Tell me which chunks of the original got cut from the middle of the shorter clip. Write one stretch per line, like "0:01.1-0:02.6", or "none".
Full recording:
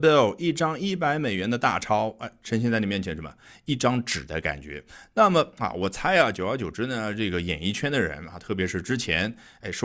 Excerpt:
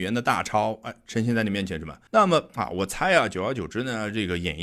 0:03.4-0:05.1